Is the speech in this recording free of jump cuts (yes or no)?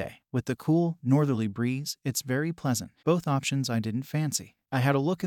no